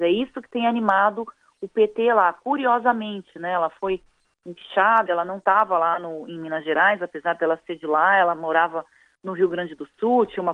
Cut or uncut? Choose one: uncut